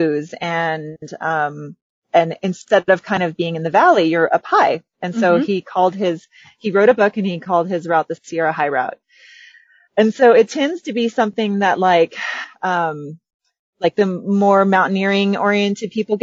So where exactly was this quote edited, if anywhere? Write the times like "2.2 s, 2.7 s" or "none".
none

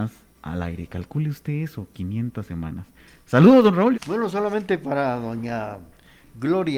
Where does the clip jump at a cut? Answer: 3.9 s

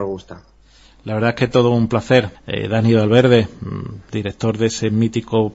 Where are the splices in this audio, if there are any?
2.3 s

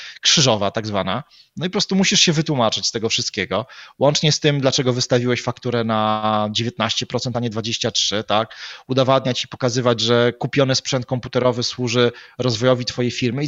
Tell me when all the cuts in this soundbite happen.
none

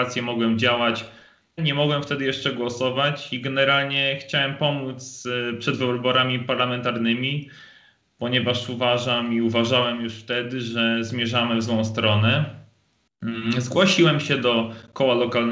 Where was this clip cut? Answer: 1.6 s

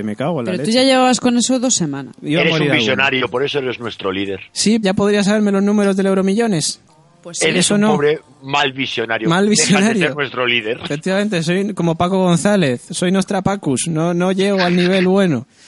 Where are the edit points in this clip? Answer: 2.1 s, 4.8 s

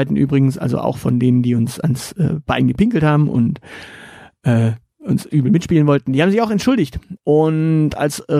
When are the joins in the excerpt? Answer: 7.2 s

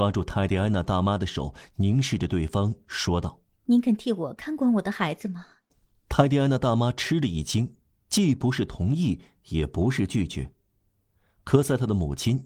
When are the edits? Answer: none

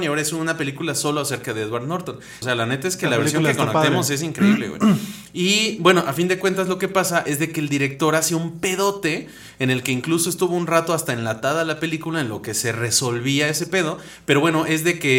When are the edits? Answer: 2.4 s

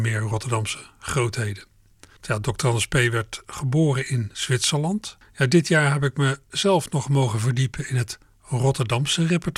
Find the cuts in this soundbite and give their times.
2.2 s, 5.2 s

